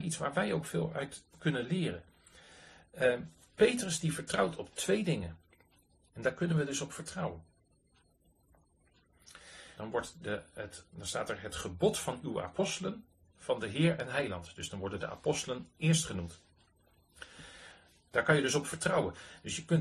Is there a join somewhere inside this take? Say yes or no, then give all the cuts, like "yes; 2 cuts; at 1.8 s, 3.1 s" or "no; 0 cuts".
yes; 2 cuts; at 6.0 s, 9.8 s